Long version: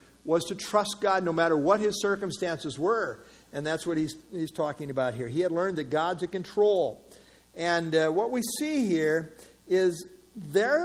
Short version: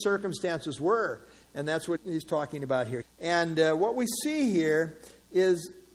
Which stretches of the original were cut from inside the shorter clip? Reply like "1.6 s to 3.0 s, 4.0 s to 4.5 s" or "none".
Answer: 3.9 s to 4.2 s, 5.3 s to 7.4 s